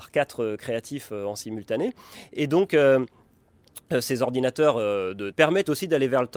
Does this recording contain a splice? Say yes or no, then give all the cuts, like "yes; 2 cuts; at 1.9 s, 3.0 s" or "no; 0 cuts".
yes; 1 cut; at 5.3 s